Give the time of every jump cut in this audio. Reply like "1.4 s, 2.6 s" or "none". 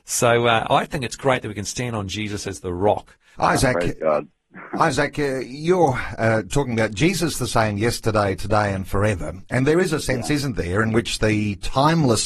3.4 s